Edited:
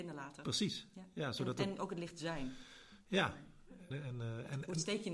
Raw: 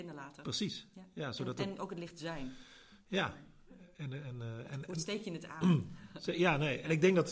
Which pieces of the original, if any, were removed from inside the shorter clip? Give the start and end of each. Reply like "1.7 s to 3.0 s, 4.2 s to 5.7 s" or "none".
3.9 s to 4.1 s